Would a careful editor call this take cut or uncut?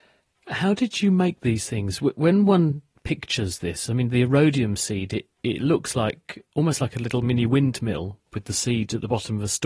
uncut